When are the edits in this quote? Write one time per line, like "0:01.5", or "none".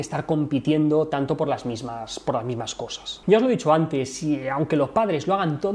0:03.2

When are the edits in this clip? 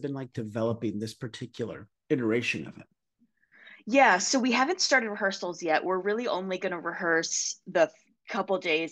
none

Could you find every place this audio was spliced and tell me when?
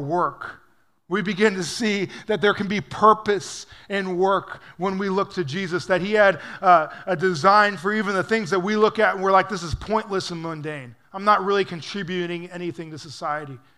none

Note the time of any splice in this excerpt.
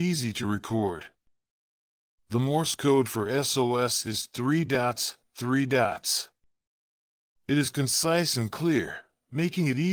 0:05.2

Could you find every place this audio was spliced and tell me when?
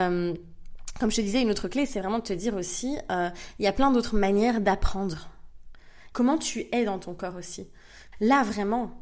0:06.1
0:08.1

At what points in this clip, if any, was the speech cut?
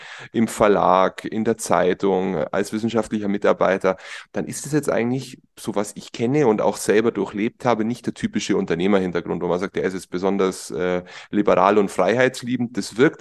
none

